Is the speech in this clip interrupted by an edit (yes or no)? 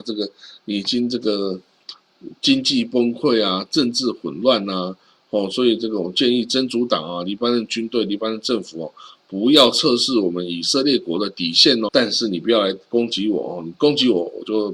yes